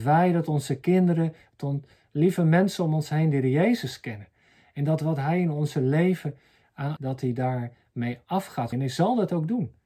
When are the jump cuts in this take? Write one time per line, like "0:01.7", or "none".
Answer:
0:07.0
0:08.7

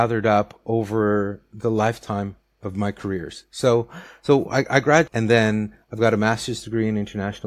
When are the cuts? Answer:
0:05.1

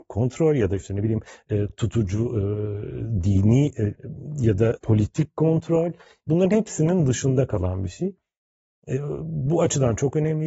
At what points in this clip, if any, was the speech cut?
none

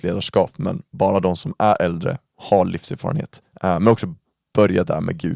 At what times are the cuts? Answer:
0:03.5

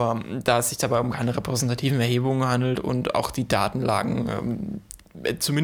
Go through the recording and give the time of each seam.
none

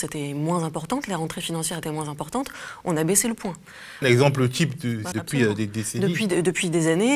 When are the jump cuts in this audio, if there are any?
0:04.0
0:05.1

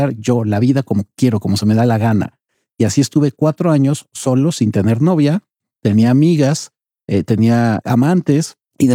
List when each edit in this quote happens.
none

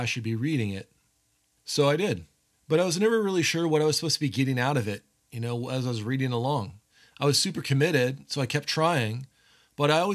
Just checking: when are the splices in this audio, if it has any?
none

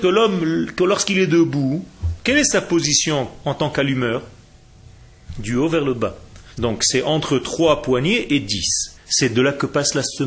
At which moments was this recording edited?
0:06.5
0:08.9

